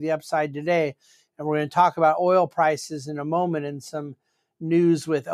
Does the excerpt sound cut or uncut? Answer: uncut